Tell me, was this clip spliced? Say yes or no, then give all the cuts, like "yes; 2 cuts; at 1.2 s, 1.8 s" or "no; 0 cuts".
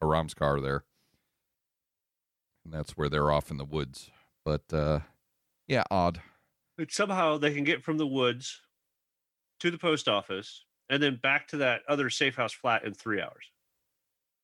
no; 0 cuts